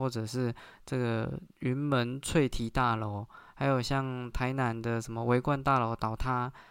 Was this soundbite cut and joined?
no; 0 cuts

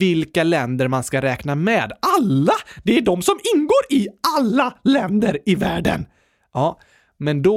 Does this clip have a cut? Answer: no; 0 cuts

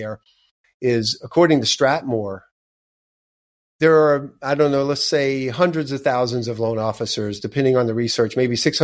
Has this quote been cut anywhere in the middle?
no; 0 cuts

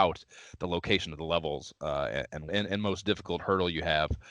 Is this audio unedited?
no; 1 cut; at 2.5 s

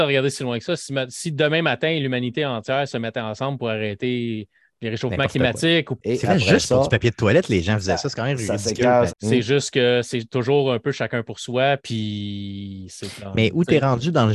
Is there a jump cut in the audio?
yes; 3 cuts; at 6.0 s, 9.1 s, 11.8 s

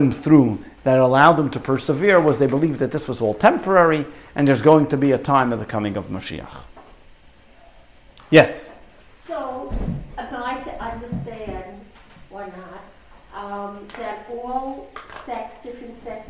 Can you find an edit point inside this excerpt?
no; 0 cuts

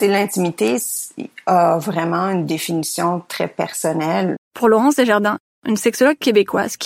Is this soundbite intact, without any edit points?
no; 1 cut; at 4.4 s

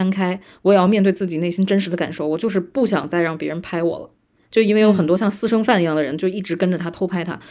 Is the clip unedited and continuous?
yes; 0 cuts

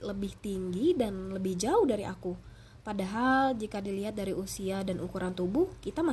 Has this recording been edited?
no; 0 cuts

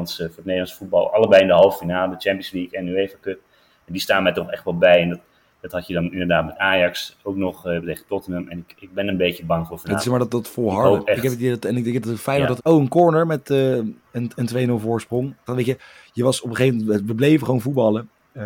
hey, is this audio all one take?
no; 2 cuts; at 12.6 s, 15.5 s

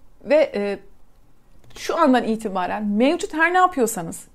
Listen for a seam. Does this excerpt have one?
no; 0 cuts

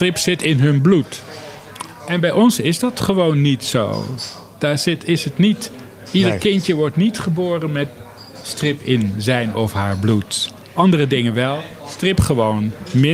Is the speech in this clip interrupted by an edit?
yes; 1 cut; at 10.7 s

